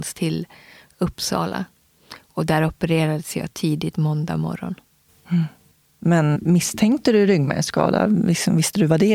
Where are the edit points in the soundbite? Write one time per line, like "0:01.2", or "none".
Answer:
0:06.3